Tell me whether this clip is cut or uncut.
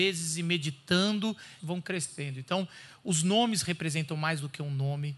cut